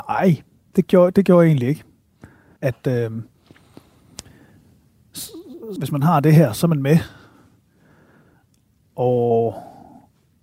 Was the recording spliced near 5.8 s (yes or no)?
yes